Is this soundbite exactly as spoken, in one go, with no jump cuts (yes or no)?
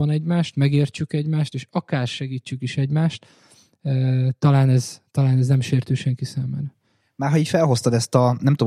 yes